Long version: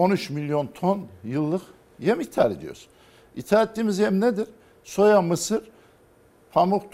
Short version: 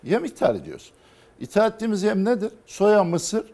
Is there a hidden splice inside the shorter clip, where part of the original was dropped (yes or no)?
yes